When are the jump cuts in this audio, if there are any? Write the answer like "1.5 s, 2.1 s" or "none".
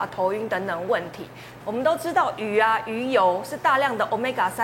1.6 s